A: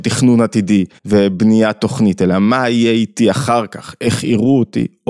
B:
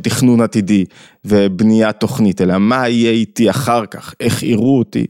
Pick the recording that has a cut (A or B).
A